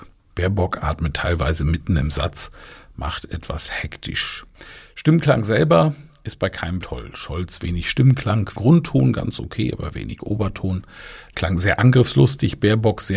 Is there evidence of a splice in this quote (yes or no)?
yes